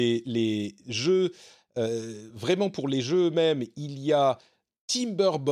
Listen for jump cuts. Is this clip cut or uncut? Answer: uncut